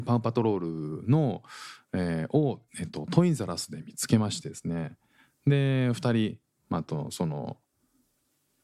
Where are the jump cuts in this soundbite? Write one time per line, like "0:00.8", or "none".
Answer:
0:02.7